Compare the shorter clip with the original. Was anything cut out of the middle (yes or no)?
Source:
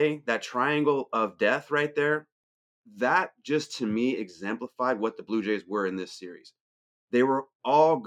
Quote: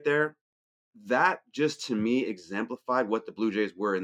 no